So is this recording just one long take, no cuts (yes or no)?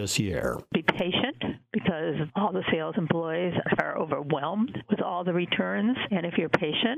no